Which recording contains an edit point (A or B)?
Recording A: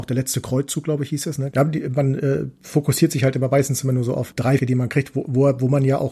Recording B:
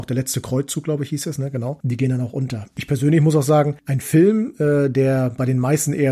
A